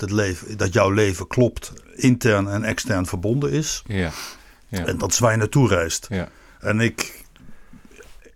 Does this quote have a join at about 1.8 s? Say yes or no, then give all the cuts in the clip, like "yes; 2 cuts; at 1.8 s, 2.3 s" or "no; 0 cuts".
yes; 1 cut; at 1.8 s